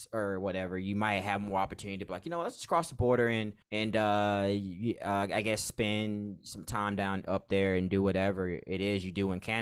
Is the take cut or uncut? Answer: cut